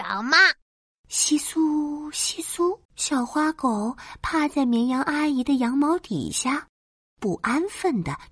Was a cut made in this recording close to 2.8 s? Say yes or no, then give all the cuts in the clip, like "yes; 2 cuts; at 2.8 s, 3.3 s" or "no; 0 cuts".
yes; 2 cuts; at 1.0 s, 2.8 s